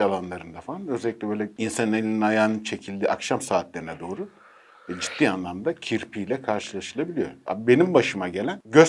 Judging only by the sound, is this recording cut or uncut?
uncut